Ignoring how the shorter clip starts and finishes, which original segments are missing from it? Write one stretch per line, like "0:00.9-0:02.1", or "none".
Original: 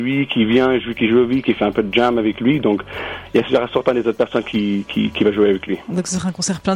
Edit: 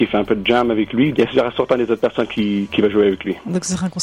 0:02.6-0:03.3
0:04.9-0:05.1